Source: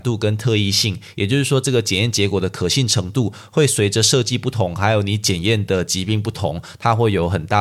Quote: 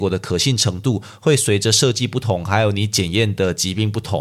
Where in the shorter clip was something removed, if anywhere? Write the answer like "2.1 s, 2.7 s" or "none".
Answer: none